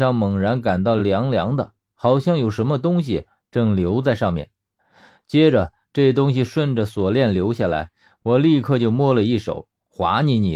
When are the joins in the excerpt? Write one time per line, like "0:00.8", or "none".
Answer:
none